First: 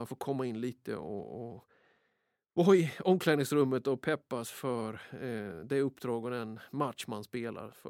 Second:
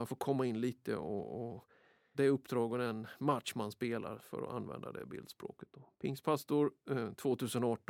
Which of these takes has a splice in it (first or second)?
second